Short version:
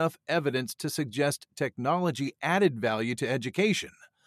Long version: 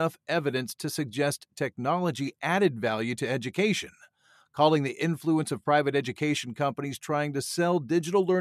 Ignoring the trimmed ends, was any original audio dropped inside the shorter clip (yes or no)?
no